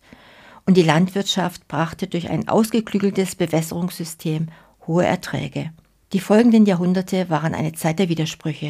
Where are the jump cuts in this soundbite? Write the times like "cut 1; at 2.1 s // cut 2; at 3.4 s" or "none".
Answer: cut 1; at 6.0 s